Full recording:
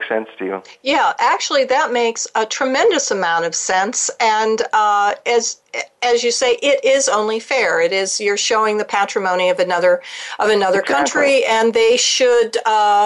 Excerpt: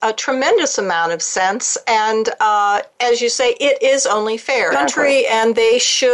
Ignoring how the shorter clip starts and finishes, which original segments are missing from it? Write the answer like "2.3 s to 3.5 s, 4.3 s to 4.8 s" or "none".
5.2 s to 5.9 s, 7.7 s to 10.9 s